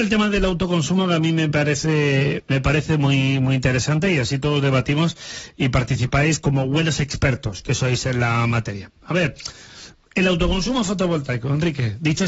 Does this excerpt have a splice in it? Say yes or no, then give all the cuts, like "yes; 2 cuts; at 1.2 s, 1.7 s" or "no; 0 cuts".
no; 0 cuts